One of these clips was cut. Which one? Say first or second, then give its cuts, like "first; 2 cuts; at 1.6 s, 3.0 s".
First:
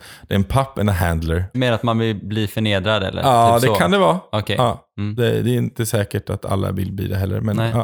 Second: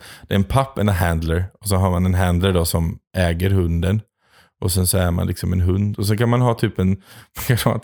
first; 1 cut; at 1.5 s